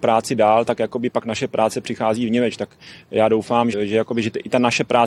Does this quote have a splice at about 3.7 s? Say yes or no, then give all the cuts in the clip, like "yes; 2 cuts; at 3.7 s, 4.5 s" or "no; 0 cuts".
yes; 1 cut; at 3.7 s